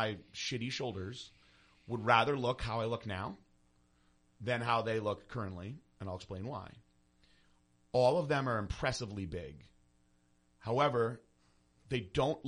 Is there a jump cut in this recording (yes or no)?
no